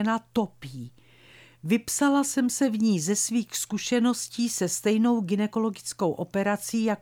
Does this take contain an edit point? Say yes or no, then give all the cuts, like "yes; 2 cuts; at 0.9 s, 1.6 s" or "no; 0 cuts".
no; 0 cuts